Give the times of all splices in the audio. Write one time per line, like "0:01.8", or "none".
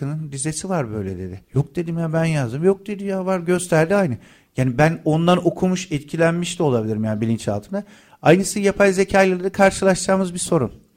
0:01.4